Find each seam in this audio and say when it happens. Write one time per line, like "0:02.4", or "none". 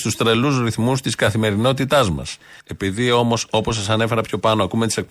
0:02.6